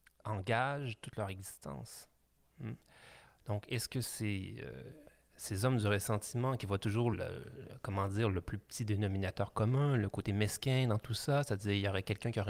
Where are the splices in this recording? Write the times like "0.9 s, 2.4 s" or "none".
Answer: 7.1 s